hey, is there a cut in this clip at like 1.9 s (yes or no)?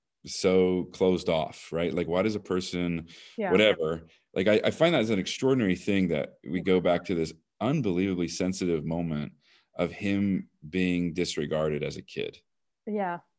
no